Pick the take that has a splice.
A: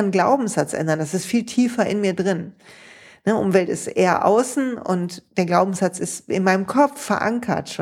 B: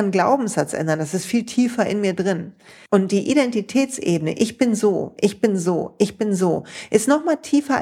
B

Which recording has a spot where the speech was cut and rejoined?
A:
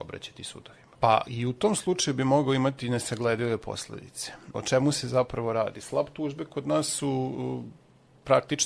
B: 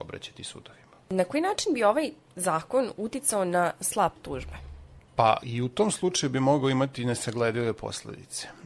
A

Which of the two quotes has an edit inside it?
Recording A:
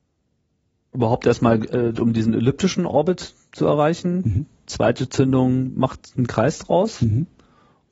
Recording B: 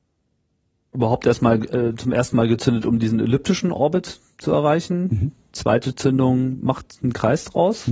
A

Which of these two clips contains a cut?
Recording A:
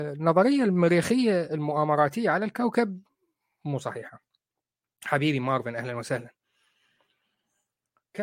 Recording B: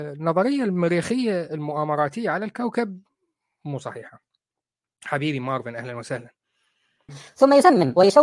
B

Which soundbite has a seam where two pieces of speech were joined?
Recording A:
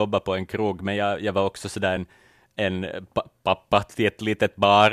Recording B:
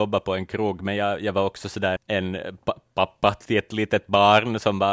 B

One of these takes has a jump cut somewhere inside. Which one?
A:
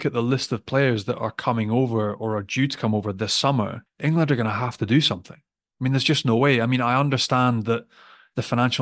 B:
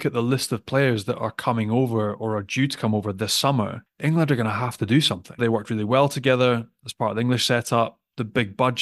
B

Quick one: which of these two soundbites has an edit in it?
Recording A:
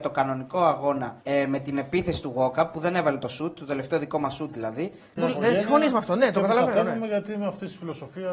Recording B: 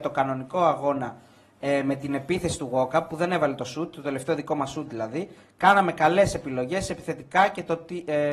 A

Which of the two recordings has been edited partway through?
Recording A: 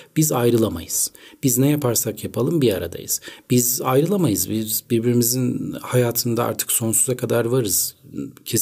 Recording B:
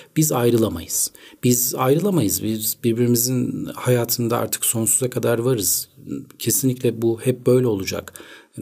B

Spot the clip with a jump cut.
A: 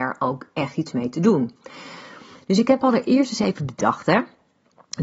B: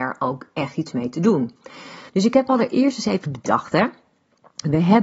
B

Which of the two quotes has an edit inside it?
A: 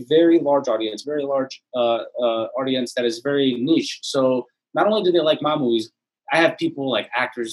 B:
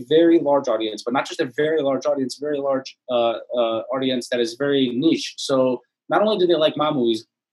A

